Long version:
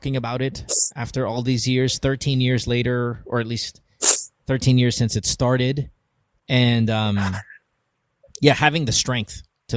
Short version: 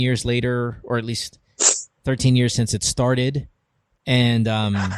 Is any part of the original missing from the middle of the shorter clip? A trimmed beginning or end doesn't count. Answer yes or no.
no